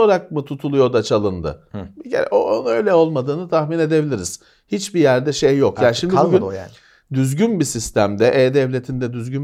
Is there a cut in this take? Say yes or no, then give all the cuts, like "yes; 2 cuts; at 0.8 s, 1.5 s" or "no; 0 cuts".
no; 0 cuts